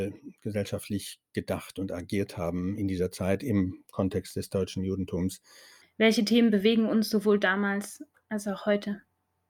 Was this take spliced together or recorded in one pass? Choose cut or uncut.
cut